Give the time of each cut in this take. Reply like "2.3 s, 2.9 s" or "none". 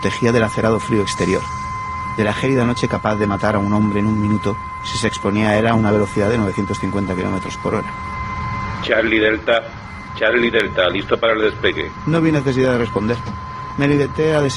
10.1 s